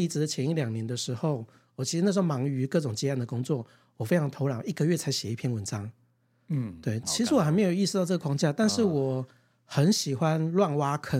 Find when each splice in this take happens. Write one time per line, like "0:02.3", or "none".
0:07.0